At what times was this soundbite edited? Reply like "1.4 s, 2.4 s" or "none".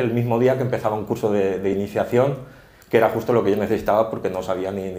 none